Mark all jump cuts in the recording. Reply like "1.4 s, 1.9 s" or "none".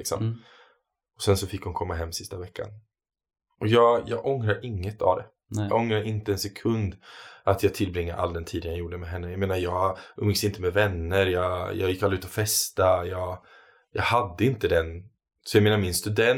none